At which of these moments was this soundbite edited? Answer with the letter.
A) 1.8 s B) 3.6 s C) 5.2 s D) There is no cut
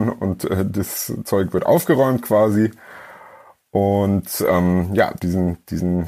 C